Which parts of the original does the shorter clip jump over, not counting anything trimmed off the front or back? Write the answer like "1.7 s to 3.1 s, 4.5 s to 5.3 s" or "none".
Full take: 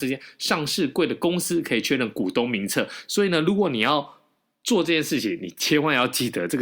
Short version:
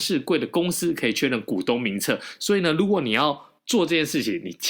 4.3 s to 4.5 s